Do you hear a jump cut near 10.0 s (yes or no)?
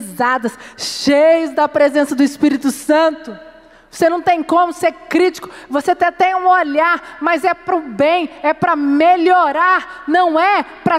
no